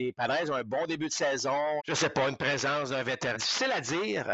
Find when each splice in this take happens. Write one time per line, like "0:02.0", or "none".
0:01.8
0:03.3